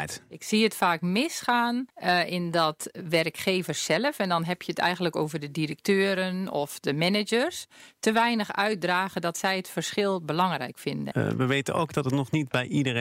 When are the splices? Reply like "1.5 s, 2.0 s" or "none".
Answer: 1.9 s, 11.1 s